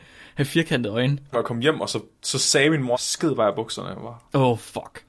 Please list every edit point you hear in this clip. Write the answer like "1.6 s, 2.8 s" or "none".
1.3 s, 2.9 s